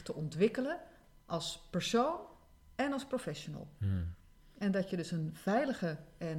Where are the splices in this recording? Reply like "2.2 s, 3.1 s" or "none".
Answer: none